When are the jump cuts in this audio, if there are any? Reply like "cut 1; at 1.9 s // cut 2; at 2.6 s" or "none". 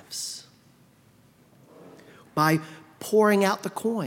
cut 1; at 2.2 s